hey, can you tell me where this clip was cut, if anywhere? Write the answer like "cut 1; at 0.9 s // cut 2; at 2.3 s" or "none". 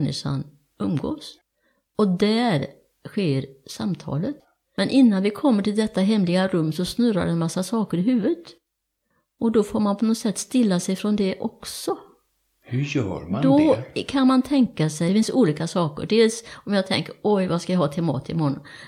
cut 1; at 15.1 s